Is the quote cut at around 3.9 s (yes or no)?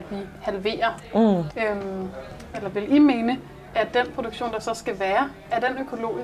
no